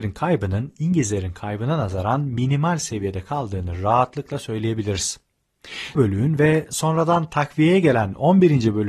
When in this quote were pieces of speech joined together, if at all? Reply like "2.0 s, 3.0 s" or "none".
6.0 s